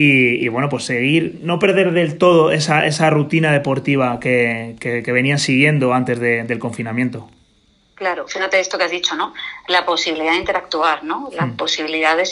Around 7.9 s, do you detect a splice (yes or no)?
no